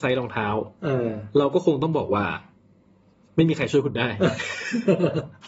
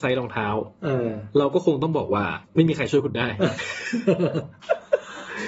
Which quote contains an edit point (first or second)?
second